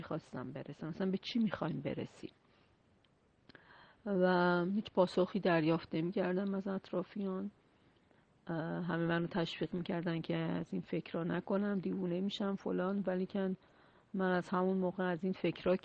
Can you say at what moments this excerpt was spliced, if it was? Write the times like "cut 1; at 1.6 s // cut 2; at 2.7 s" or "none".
none